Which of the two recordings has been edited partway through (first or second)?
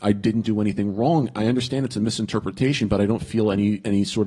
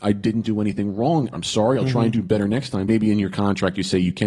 second